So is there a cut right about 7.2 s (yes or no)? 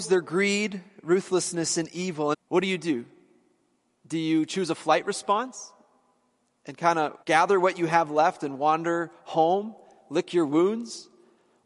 yes